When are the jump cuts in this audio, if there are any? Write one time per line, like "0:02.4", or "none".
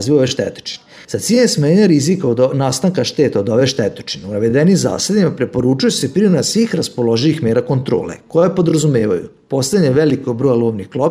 0:01.0